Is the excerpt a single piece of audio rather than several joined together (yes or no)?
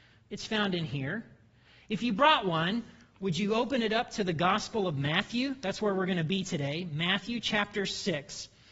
yes